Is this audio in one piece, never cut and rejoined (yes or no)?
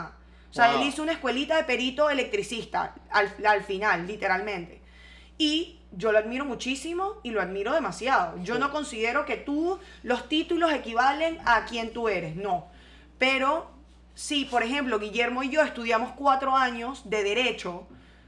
yes